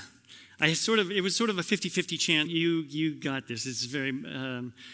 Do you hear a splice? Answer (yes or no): yes